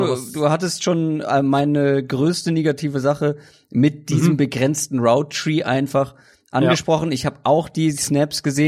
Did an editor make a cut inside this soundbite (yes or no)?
no